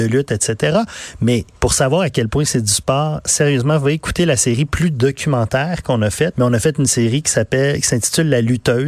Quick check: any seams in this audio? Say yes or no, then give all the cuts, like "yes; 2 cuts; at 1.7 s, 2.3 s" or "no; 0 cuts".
yes; 2 cuts; at 1.5 s, 6.3 s